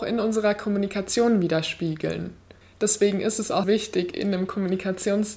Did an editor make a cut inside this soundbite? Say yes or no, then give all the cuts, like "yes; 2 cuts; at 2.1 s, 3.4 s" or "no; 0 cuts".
yes; 2 cuts; at 2.6 s, 3.6 s